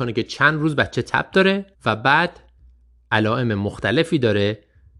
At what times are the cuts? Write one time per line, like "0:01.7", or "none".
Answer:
0:01.7